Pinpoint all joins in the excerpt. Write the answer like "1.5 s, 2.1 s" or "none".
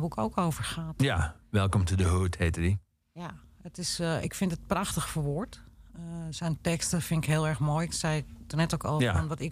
none